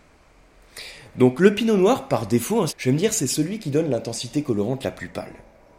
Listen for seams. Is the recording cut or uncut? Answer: cut